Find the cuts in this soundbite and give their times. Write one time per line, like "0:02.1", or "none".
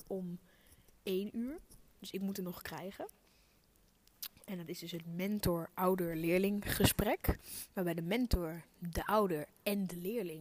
none